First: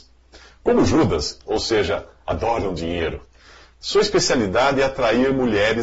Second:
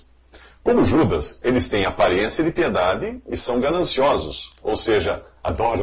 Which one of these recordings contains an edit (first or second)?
first